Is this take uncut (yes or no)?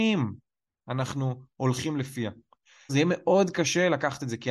no